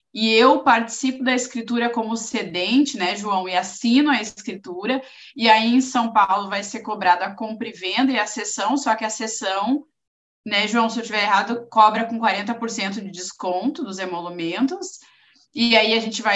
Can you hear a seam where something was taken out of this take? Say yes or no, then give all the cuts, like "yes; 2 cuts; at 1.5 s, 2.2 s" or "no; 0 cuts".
no; 0 cuts